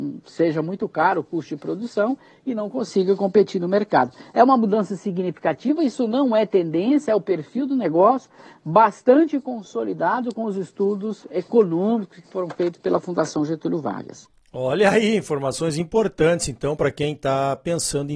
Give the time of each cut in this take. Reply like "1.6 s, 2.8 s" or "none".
none